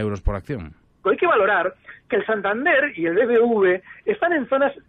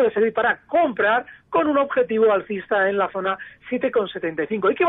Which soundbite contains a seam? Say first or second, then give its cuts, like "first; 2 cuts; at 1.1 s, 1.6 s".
first; 1 cut; at 1.0 s